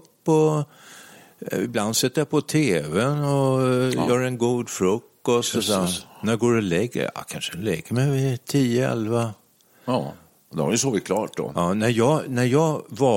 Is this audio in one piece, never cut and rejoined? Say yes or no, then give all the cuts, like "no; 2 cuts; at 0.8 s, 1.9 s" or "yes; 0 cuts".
yes; 0 cuts